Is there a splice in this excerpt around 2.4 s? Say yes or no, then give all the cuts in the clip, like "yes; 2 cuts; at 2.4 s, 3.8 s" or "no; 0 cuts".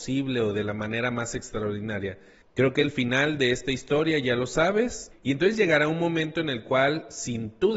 yes; 2 cuts; at 2.4 s, 5.1 s